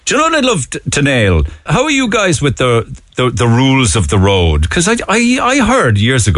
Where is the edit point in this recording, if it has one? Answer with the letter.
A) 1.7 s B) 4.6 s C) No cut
A